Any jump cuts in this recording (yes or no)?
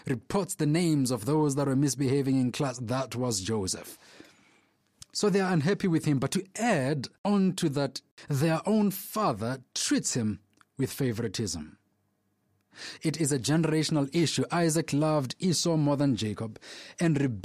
no